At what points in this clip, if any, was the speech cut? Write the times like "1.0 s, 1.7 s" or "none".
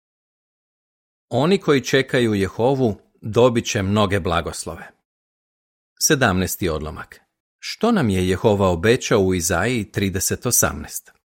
7.4 s